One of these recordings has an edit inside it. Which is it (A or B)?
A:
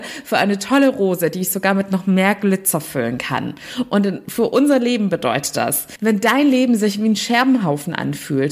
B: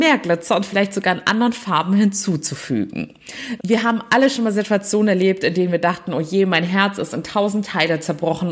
B